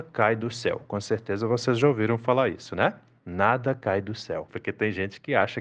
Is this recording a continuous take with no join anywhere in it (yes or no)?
no